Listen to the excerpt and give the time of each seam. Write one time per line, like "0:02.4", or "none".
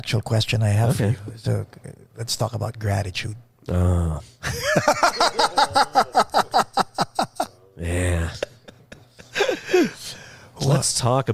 none